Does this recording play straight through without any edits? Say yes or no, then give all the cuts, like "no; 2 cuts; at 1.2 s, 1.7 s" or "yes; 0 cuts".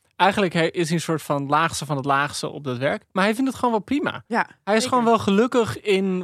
yes; 0 cuts